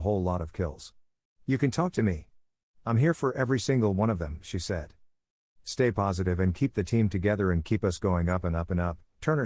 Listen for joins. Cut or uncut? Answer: cut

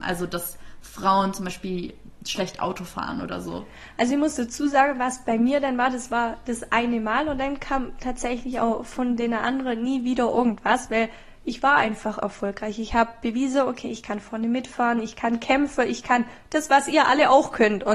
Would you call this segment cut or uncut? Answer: cut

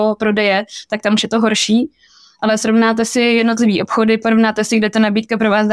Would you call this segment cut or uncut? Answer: uncut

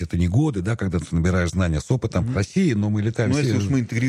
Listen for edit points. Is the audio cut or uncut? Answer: cut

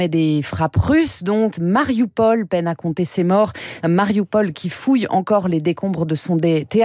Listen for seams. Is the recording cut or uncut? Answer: cut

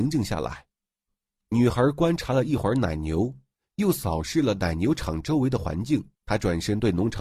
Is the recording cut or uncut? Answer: cut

